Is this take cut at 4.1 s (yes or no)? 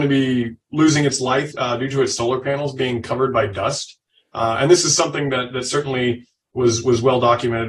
no